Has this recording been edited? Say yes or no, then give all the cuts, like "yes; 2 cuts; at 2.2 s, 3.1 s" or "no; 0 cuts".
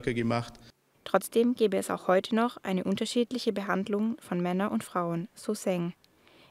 yes; 1 cut; at 0.9 s